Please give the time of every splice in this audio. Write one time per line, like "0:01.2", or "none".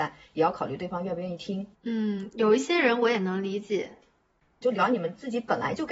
0:01.7
0:04.6